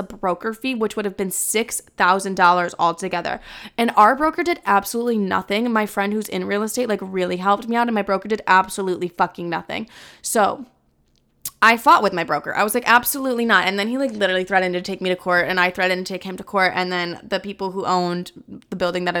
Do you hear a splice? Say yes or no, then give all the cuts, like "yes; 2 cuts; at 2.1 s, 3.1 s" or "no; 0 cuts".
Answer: no; 0 cuts